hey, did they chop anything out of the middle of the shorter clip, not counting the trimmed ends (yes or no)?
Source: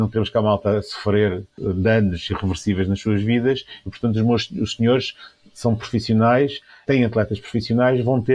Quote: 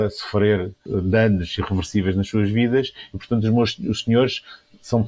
no